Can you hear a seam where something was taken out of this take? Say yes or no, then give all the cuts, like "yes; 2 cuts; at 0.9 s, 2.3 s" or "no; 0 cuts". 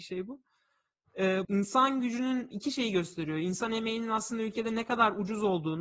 yes; 1 cut; at 1.4 s